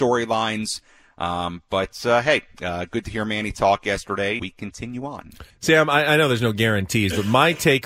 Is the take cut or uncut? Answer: cut